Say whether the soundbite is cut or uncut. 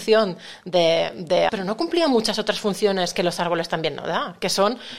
cut